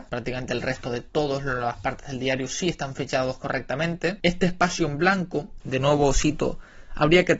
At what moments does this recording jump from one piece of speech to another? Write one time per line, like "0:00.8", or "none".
0:04.2
0:05.6